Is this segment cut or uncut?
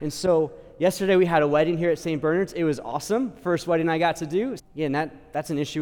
cut